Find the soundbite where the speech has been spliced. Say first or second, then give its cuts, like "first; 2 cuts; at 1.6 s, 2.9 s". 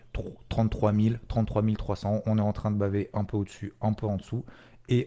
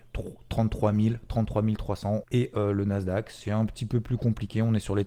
second; 1 cut; at 2.2 s